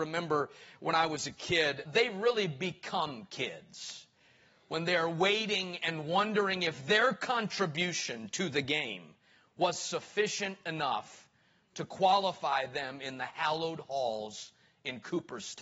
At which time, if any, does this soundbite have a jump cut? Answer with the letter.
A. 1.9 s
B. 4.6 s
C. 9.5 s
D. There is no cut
A